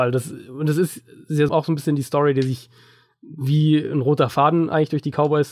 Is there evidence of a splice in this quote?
yes; 1 cut; at 1.5 s

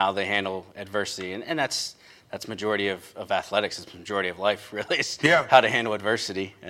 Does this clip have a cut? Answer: no; 0 cuts

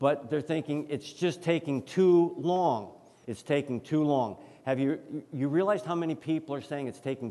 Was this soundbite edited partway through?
yes; 1 cut; at 3.2 s

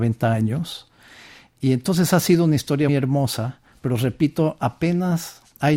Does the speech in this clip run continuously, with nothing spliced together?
no; 1 cut; at 2.9 s

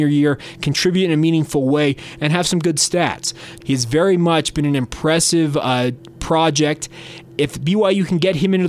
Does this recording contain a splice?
yes; 1 cut; at 3.6 s

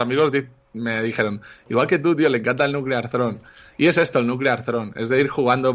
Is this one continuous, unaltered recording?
yes; 0 cuts

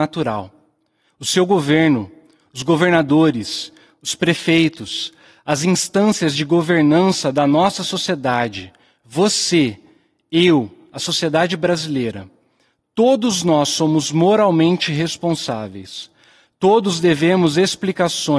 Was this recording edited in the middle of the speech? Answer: yes; 1 cut; at 1.1 s

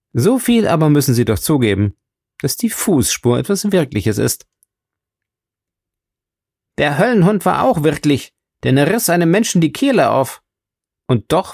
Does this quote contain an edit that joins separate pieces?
no; 0 cuts

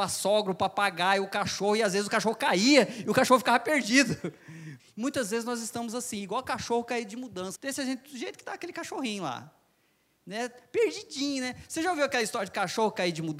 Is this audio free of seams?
no; 2 cuts; at 4.8 s, 7.6 s

